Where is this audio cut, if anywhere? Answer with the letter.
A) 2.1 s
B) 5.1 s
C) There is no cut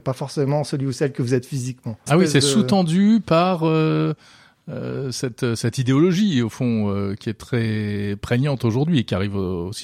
A